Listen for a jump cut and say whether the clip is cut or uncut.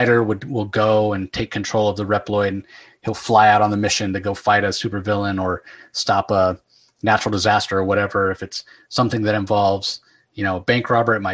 uncut